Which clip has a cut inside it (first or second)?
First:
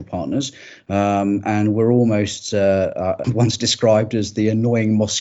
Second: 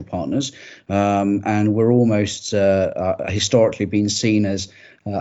first